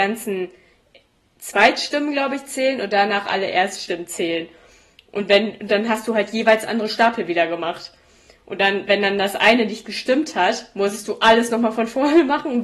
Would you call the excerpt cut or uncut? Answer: uncut